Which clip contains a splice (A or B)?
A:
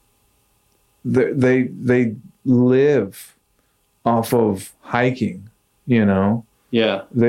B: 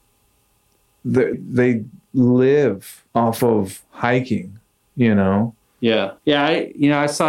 B